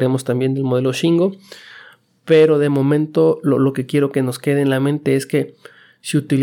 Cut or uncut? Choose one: uncut